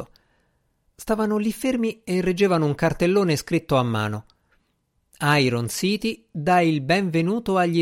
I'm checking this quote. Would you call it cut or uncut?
uncut